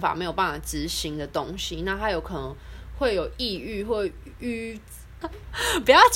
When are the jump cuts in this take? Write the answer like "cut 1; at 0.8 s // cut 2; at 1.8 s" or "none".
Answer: cut 1; at 5.2 s